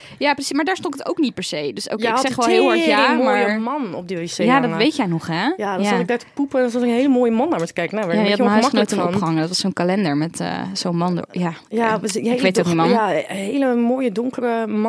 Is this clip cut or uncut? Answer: uncut